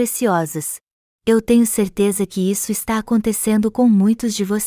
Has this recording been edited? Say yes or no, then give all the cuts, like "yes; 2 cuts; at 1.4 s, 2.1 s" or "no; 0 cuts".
yes; 1 cut; at 1.2 s